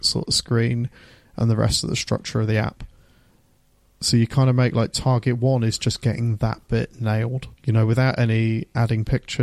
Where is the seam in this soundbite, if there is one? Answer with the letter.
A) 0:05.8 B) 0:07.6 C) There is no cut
B